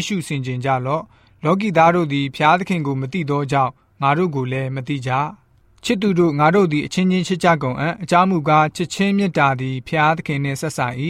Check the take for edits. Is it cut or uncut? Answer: uncut